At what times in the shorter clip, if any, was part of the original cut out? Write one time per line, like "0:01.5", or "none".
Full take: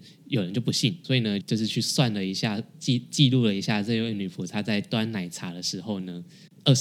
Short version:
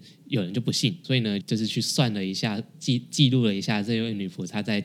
none